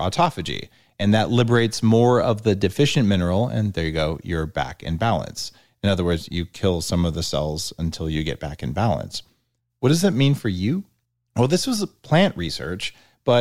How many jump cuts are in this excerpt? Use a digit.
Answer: 0